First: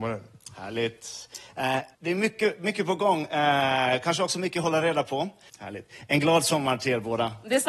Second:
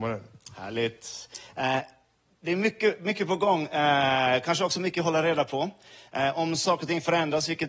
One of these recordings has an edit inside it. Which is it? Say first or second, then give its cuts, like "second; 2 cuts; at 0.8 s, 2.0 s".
first; 2 cuts; at 1.9 s, 5.5 s